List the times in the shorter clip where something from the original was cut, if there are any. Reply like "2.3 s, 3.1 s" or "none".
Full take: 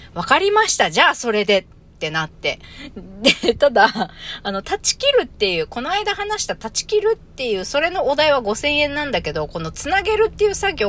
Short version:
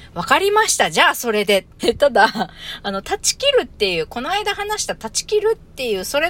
1.8 s